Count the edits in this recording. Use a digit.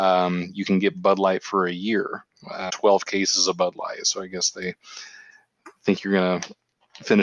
1